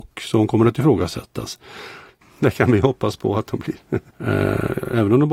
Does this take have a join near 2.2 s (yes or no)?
yes